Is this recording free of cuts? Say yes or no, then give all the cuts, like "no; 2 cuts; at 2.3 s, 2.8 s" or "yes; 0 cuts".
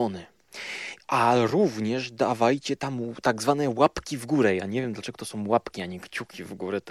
yes; 0 cuts